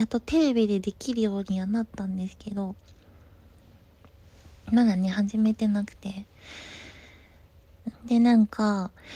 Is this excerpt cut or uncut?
cut